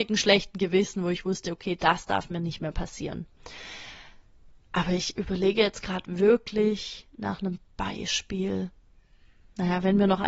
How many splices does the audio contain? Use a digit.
0